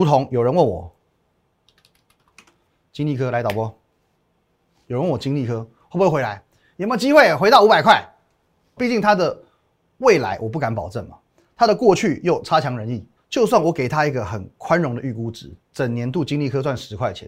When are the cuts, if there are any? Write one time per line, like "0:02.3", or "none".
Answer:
0:08.8
0:13.2
0:15.7